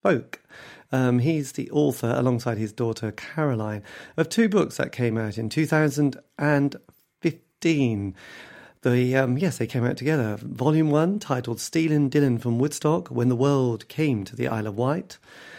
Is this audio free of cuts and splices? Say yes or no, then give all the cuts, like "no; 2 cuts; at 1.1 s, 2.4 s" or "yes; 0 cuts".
yes; 0 cuts